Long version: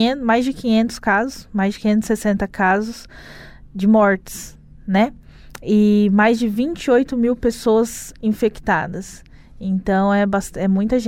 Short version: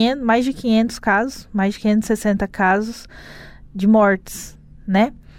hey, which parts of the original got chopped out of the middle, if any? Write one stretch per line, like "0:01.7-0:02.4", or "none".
none